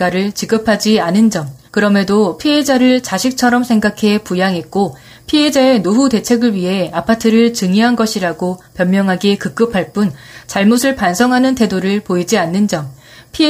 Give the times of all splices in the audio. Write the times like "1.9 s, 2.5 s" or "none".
1.7 s